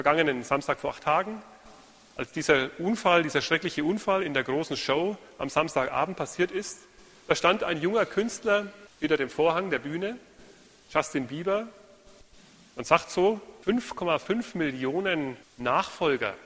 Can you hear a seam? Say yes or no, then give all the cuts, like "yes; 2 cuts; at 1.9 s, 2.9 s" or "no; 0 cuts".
no; 0 cuts